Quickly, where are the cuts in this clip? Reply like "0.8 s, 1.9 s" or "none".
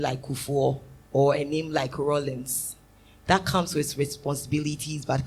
1.0 s

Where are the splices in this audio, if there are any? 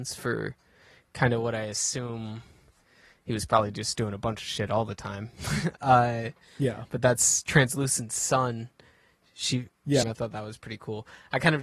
10.0 s

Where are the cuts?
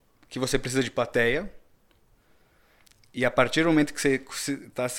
none

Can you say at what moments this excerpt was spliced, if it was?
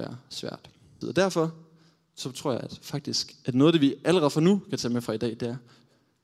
1.0 s

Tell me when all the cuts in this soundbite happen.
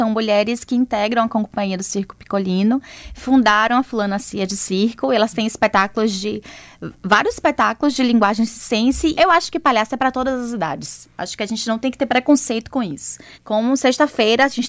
9.1 s, 13.3 s

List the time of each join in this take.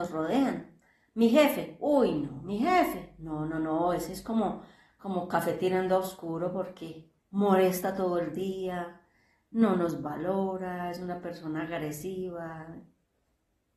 7.2 s

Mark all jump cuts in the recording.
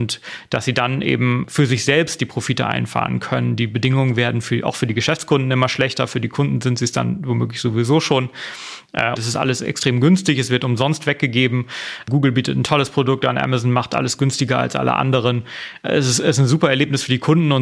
9.2 s

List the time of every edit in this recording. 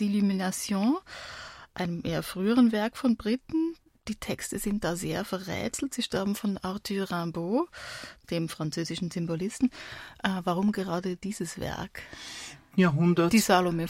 12.7 s

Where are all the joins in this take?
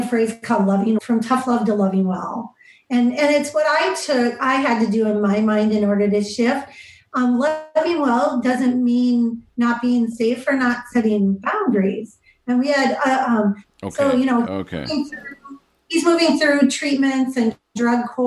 1.0 s

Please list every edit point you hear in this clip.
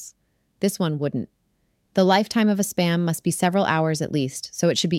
1.9 s

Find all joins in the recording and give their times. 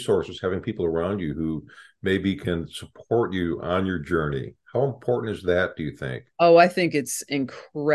6.3 s

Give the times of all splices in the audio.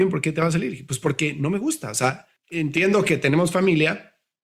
2.4 s

